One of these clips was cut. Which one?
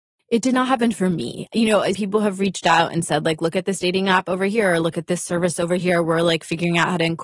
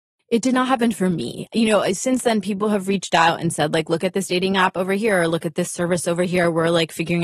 first; 1 cut; at 1.9 s

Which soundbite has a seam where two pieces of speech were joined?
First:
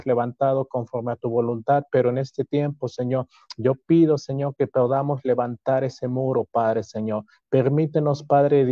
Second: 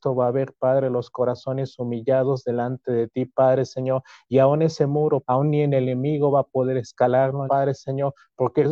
second; 2 cuts; at 5.2 s, 7.5 s

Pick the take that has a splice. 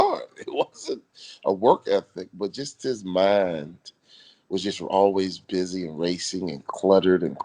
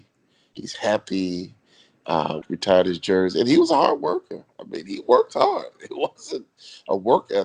second; 1 cut; at 2.4 s

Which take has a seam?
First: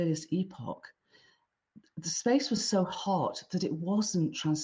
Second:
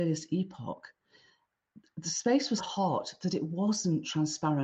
second; 1 cut; at 2.6 s

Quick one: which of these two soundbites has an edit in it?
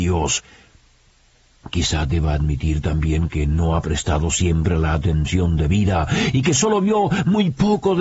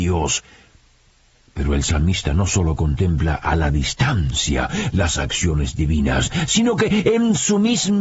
second; 1 cut; at 1.4 s

